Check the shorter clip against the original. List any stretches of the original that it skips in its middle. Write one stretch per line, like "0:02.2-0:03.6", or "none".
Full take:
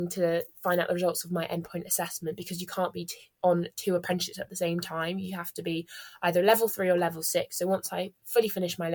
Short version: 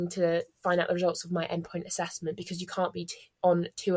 none